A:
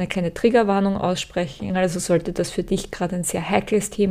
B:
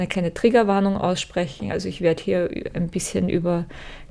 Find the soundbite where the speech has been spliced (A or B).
A